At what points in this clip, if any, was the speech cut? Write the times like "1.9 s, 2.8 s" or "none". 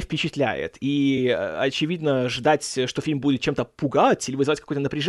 none